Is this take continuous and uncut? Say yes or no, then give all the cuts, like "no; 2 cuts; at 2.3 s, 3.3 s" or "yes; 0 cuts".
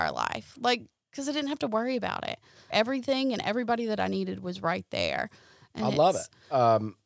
no; 1 cut; at 2.7 s